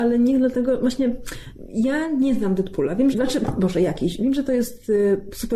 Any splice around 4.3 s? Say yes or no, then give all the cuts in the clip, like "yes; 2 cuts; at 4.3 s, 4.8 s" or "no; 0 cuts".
no; 1 cut; at 3.1 s